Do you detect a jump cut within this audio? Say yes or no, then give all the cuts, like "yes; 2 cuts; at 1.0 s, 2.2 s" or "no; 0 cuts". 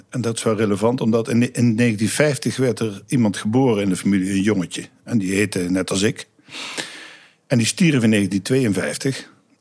no; 0 cuts